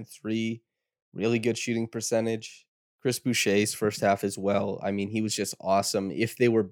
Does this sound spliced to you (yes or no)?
no